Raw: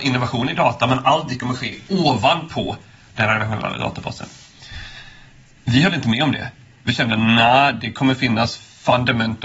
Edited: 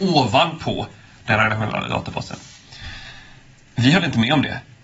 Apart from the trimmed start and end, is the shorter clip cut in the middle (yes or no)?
no